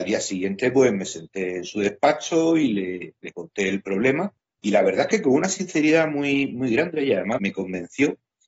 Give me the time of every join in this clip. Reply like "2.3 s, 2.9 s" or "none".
7.4 s